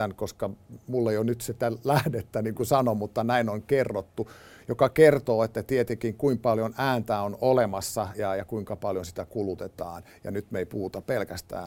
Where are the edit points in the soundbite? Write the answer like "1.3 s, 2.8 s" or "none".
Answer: 8.1 s